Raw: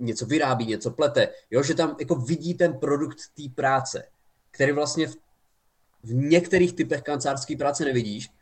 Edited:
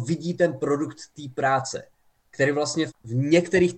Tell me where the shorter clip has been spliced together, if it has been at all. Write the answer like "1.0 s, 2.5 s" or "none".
2.9 s